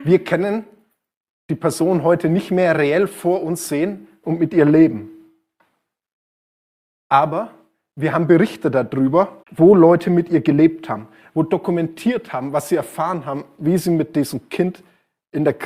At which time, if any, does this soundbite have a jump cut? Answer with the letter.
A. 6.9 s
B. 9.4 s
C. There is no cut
B